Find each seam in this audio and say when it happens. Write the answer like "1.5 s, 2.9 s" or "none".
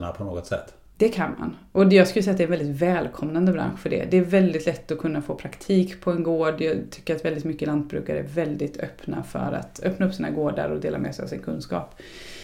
none

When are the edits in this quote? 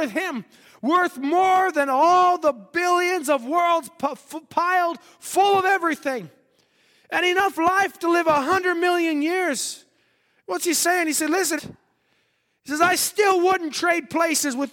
11.6 s

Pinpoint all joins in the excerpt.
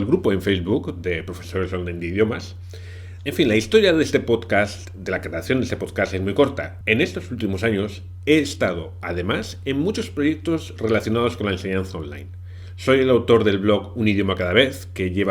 3.2 s, 6.8 s

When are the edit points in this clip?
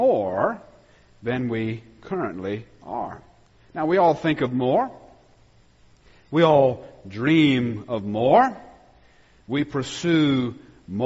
none

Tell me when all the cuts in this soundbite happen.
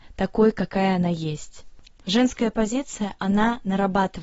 1.9 s

